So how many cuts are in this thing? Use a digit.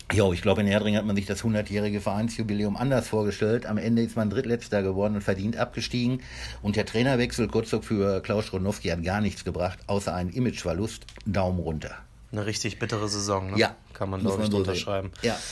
0